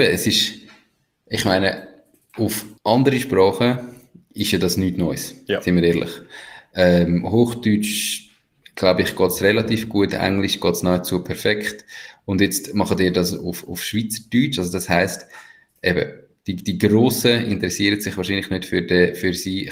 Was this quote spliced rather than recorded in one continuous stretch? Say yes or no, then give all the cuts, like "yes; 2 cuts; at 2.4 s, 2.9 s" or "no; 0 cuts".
yes; 1 cut; at 2.8 s